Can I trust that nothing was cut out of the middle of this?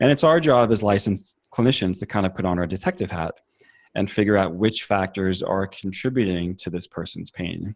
yes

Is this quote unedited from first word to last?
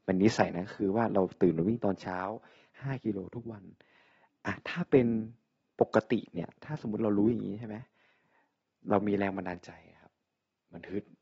yes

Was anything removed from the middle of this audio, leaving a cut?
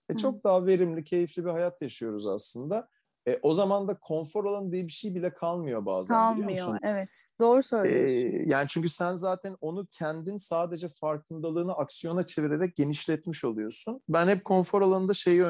yes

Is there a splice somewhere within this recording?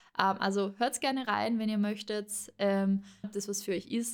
yes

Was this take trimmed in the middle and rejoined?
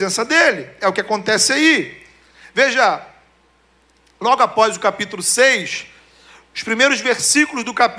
no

